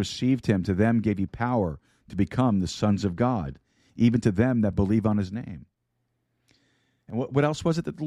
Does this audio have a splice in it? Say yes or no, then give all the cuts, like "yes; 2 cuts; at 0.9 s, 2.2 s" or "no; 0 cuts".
no; 0 cuts